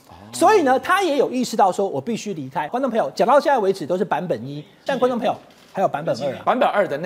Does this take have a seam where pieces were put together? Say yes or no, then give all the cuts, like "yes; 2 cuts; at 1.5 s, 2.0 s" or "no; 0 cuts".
yes; 2 cuts; at 2.7 s, 4.9 s